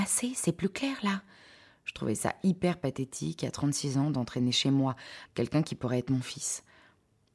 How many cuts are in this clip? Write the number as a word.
one